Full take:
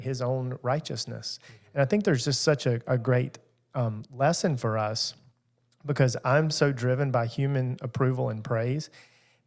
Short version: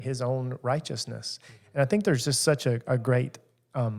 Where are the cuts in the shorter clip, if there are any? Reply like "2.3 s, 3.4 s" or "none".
none